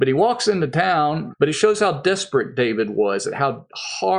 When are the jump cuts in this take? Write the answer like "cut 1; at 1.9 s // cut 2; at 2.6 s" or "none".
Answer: cut 1; at 1.3 s